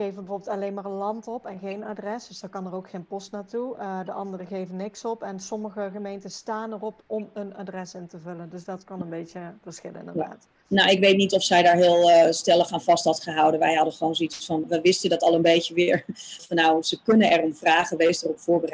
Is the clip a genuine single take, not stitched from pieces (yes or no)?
no